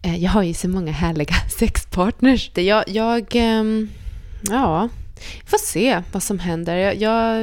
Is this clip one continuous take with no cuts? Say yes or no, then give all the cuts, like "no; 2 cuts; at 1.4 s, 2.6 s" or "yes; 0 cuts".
no; 1 cut; at 2.5 s